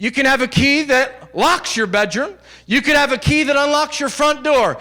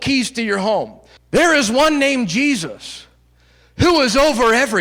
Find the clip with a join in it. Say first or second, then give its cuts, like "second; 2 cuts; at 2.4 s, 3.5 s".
second; 1 cut; at 1.2 s